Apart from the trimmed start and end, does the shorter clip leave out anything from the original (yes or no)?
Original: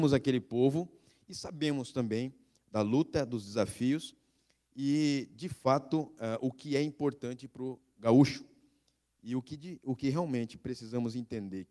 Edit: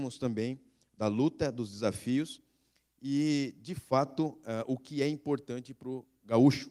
no